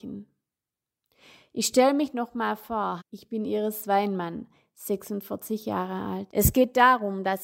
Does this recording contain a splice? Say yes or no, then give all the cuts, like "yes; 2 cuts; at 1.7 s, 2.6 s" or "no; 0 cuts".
yes; 2 cuts; at 3.0 s, 6.3 s